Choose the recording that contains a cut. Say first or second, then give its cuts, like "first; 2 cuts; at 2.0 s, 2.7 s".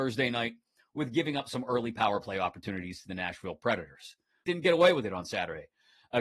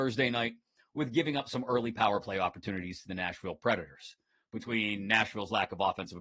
first; 1 cut; at 4.4 s